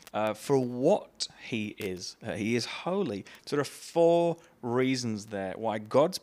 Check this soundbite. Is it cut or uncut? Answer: cut